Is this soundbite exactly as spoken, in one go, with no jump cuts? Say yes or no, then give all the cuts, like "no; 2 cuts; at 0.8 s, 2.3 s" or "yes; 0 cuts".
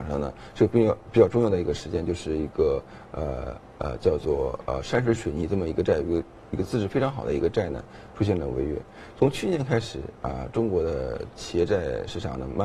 yes; 0 cuts